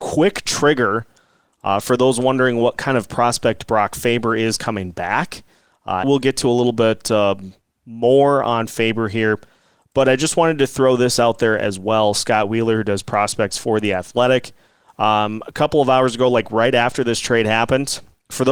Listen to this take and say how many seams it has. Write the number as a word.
one